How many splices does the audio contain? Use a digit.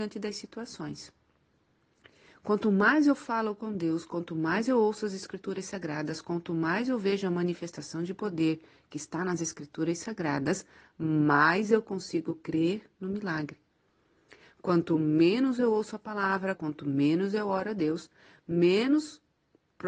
1